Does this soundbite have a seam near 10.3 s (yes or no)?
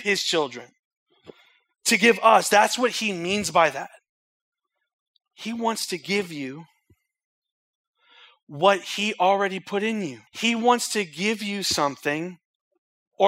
yes